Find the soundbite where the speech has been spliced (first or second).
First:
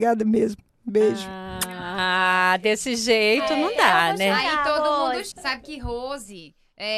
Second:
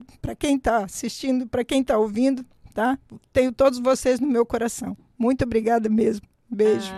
first